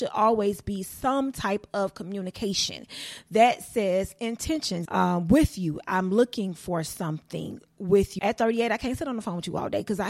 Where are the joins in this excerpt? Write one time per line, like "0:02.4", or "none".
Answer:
0:04.9
0:08.2